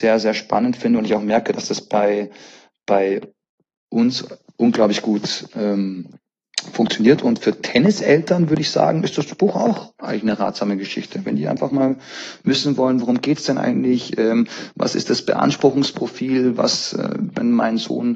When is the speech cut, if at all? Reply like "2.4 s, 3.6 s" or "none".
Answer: none